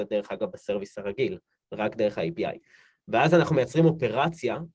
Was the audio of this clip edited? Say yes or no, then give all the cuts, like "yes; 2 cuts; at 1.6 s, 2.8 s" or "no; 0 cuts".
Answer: no; 0 cuts